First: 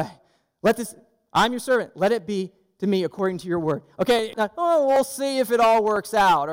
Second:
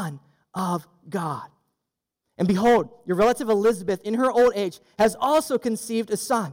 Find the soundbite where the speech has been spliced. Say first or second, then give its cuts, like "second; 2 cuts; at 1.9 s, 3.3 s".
first; 1 cut; at 4.3 s